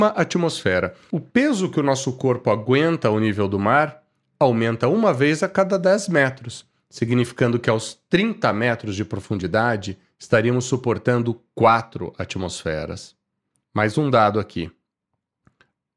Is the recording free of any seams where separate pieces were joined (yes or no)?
no